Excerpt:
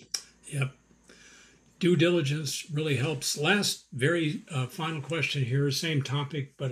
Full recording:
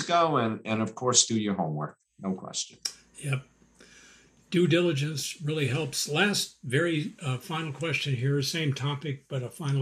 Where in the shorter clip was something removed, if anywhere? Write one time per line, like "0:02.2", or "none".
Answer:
none